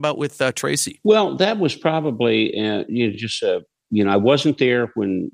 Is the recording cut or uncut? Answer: uncut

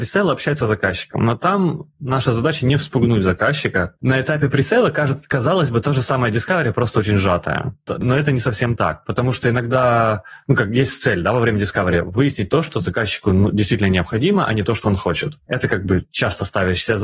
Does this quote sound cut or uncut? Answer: uncut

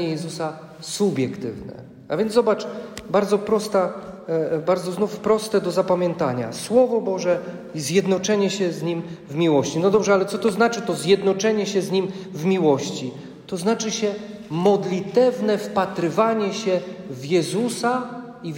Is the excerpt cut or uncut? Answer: uncut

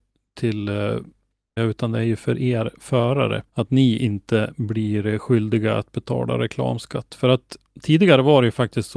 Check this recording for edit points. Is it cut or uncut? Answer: cut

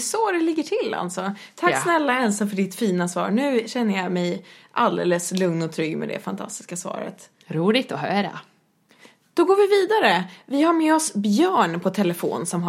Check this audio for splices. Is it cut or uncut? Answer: uncut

